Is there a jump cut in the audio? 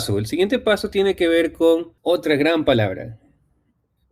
yes; 1 cut; at 2.0 s

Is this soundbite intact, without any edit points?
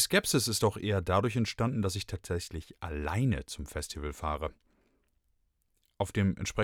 yes; 0 cuts

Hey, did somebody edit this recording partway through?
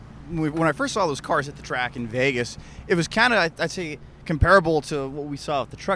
no; 0 cuts

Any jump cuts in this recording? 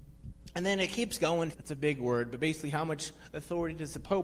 yes; 1 cut; at 1.5 s

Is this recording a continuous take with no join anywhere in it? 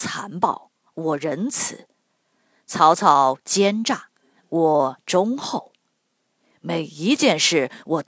yes; 0 cuts

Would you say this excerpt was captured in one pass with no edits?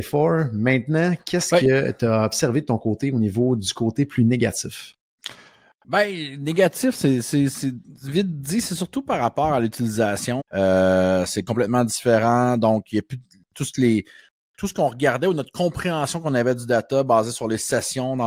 no; 1 cut; at 10.4 s

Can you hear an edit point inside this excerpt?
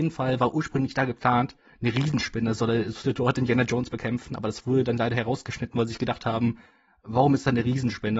yes; 1 cut; at 2.9 s

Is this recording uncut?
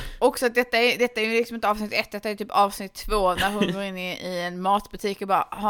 yes; 0 cuts

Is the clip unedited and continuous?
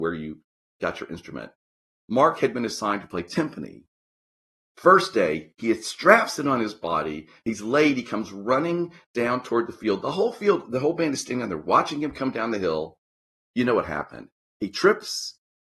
yes; 0 cuts

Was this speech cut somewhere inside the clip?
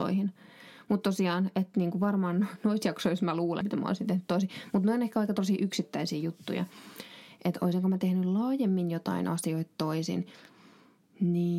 yes; 1 cut; at 3.6 s

